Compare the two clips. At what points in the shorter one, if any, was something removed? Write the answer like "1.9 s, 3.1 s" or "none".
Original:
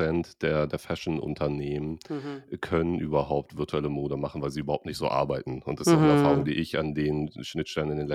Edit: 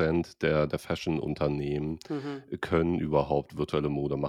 none